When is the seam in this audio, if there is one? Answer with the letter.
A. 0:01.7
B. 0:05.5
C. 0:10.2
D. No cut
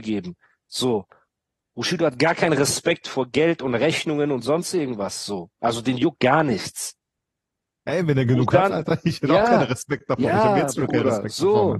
D